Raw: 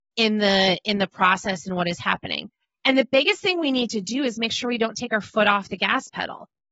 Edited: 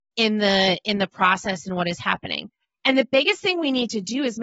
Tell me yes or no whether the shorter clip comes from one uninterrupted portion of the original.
yes